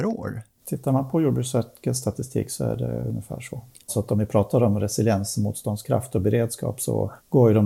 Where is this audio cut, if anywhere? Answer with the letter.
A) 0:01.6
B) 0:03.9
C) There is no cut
B